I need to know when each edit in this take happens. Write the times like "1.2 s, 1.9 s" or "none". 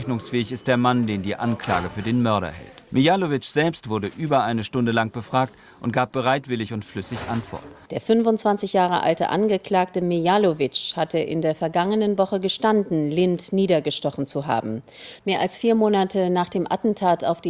2.9 s, 7.9 s, 15.2 s

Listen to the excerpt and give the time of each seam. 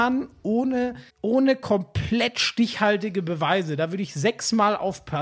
1.1 s

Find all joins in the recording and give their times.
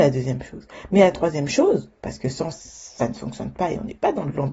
2.5 s

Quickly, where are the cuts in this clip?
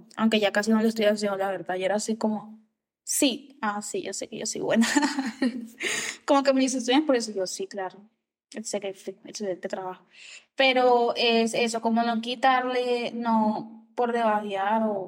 none

